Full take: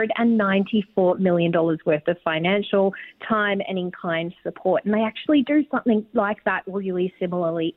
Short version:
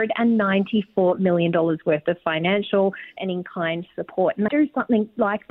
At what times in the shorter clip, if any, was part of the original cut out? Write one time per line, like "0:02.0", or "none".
0:03.2
0:04.5